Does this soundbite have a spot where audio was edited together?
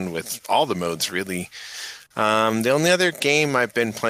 no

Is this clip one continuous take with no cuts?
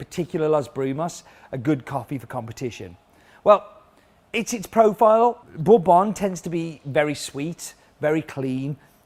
no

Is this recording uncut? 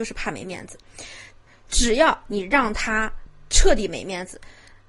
yes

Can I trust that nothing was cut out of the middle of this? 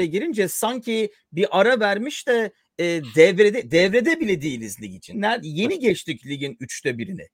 no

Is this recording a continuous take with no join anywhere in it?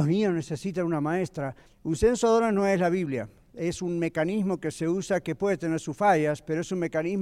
no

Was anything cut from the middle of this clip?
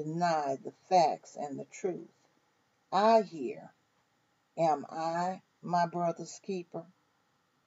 no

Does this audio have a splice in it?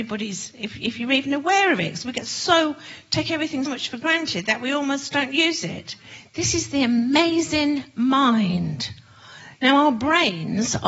yes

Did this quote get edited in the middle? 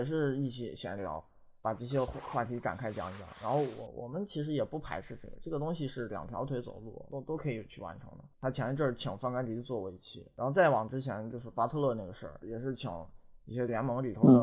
yes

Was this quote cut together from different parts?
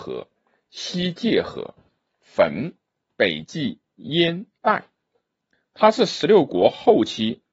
yes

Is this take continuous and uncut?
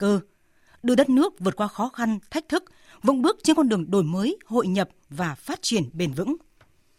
yes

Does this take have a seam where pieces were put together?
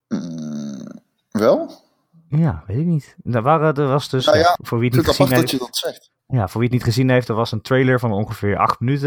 yes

